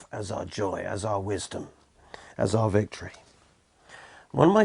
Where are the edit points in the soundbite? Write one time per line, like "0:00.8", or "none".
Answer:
none